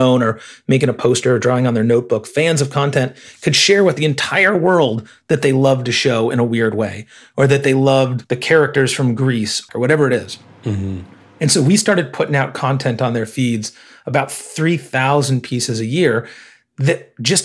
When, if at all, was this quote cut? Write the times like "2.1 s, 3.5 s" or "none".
9.7 s